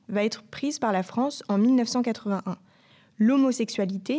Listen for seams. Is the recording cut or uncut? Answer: uncut